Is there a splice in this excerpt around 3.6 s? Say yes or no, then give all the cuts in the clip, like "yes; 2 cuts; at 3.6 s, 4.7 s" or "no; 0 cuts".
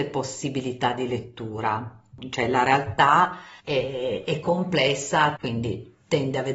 yes; 2 cuts; at 3.6 s, 5.4 s